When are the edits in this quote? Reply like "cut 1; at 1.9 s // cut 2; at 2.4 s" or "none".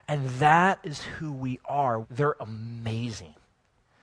cut 1; at 2.0 s

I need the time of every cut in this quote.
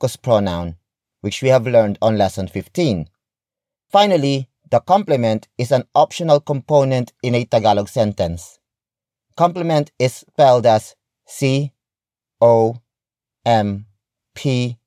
cut 1; at 3.7 s

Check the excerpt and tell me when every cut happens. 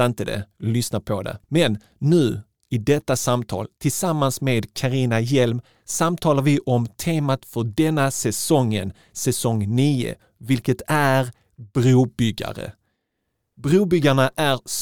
cut 1; at 1.4 s

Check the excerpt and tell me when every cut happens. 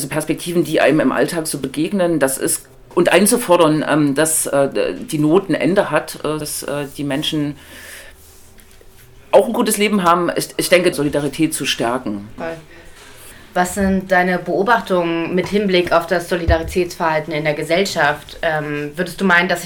cut 1; at 6.4 s // cut 2; at 10.9 s // cut 3; at 12.4 s

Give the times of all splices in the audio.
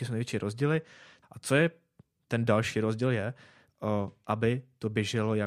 cut 1; at 1.2 s // cut 2; at 3.7 s

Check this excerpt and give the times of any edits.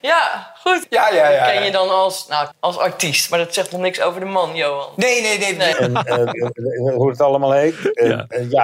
cut 1; at 2.5 s // cut 2; at 5.7 s

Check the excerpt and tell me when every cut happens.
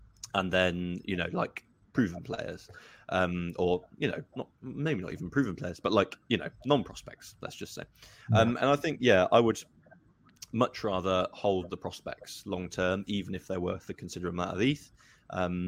none

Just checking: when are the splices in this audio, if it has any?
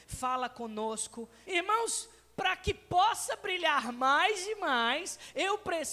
cut 1; at 1.4 s

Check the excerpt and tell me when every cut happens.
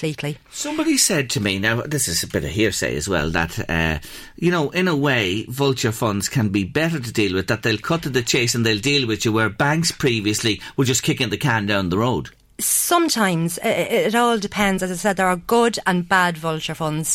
none

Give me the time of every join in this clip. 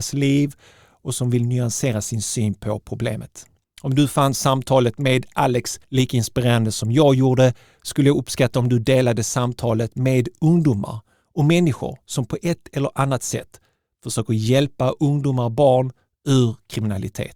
cut 1; at 3.6 s // cut 2; at 5.8 s

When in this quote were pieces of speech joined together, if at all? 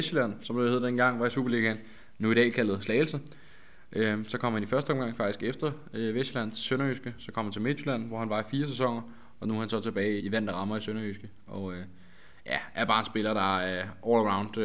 cut 1; at 10.2 s

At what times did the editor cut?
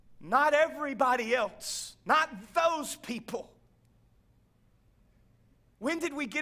none

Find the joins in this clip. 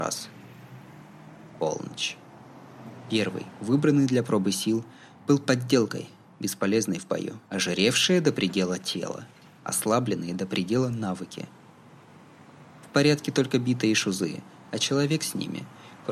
cut 1; at 7.4 s // cut 2; at 9.6 s

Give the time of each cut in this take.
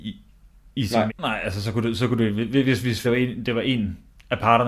cut 1; at 1.1 s // cut 2; at 3.0 s

